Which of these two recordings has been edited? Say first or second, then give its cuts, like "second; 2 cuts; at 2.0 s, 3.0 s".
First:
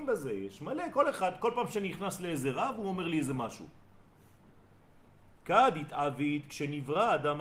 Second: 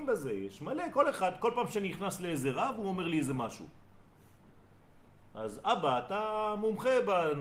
first; 1 cut; at 5.3 s